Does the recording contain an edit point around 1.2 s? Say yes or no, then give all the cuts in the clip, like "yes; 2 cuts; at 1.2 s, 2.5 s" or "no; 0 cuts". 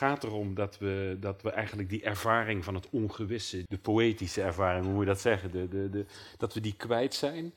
no; 1 cut; at 3.7 s